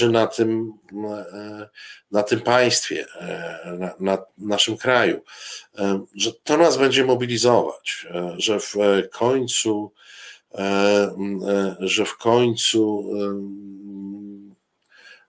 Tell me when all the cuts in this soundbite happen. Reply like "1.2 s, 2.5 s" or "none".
8.4 s